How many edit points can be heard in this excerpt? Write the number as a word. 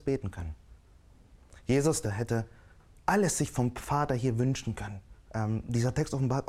two